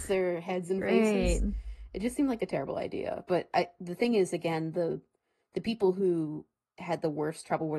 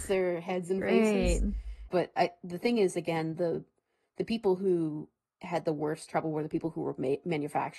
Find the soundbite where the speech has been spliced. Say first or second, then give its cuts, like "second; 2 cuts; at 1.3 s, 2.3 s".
second; 1 cut; at 1.9 s